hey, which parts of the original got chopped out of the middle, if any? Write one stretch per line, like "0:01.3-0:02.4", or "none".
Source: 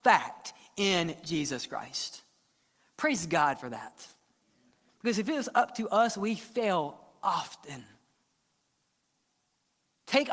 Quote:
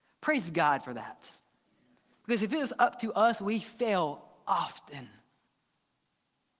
none